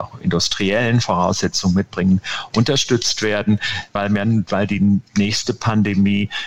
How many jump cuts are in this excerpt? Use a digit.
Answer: 1